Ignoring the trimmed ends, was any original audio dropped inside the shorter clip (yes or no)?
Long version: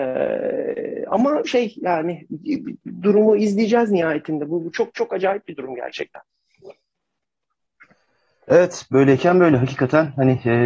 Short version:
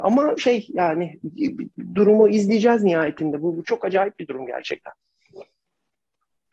yes